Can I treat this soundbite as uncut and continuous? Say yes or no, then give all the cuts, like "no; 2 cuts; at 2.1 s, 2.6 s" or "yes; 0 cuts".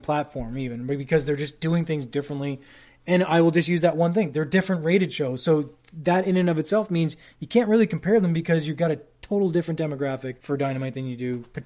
yes; 0 cuts